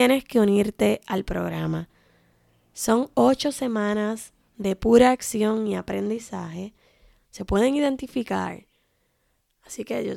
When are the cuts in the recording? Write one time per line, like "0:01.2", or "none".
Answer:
0:07.2